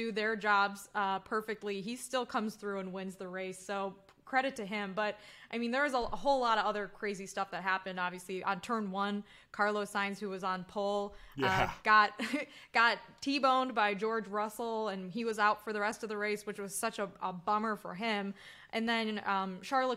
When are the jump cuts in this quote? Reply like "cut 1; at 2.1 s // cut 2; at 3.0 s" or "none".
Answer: none